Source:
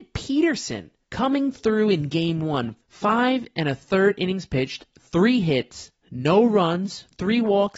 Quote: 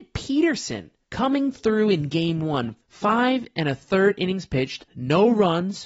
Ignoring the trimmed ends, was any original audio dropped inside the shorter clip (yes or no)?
yes